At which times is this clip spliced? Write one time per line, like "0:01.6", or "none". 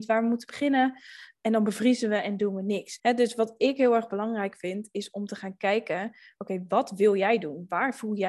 0:03.0

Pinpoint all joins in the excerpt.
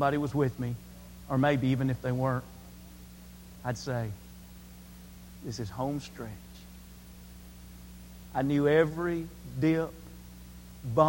none

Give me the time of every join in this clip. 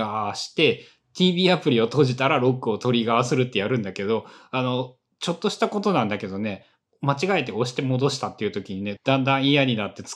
0:09.0

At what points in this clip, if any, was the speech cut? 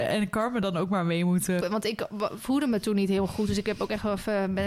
0:01.6

